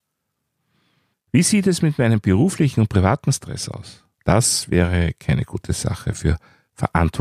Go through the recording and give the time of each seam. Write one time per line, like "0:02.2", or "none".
0:01.1
0:04.1